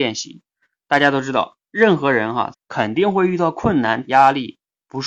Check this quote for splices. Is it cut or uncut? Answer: cut